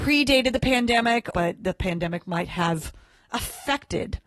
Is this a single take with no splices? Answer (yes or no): no